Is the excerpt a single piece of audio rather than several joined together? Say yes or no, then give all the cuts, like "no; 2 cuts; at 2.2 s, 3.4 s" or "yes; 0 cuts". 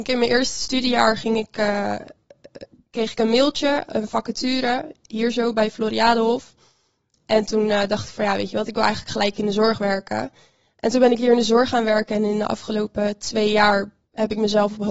yes; 0 cuts